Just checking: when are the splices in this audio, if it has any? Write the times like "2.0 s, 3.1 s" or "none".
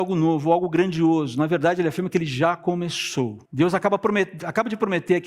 3.4 s